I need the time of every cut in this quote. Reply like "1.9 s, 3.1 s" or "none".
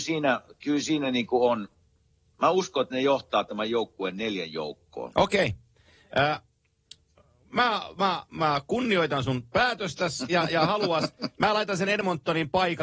none